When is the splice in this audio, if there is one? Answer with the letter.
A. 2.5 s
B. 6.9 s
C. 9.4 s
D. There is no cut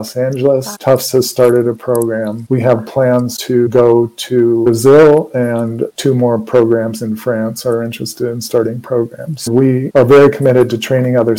D